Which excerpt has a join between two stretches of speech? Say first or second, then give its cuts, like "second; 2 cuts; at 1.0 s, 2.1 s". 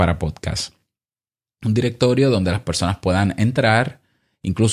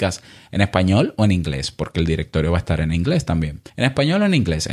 second; 1 cut; at 3.7 s